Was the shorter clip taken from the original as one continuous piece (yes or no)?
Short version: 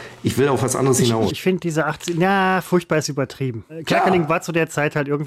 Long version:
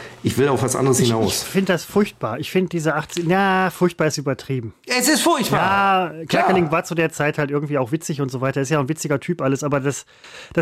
no